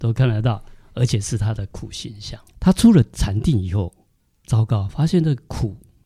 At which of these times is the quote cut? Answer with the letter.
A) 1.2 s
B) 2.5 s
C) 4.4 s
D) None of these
B